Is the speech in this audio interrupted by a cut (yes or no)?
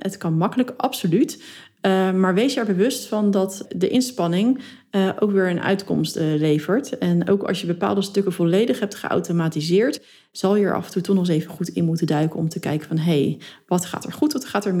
no